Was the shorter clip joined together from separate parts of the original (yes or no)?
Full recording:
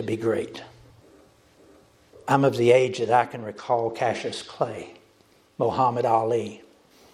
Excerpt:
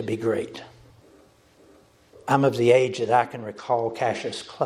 no